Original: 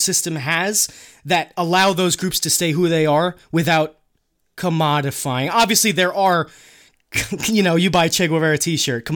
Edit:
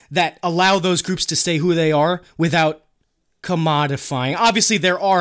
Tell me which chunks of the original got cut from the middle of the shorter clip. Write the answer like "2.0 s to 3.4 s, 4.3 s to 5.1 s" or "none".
none